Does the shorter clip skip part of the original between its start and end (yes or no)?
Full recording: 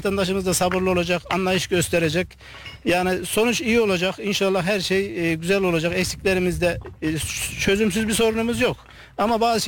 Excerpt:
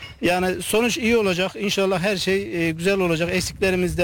no